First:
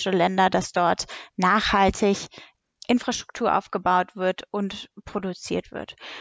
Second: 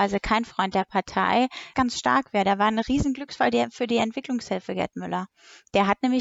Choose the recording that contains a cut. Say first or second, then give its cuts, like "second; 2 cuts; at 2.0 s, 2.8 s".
second; 1 cut; at 1.7 s